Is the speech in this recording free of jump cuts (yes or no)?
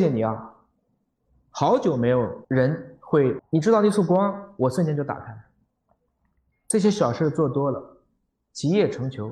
no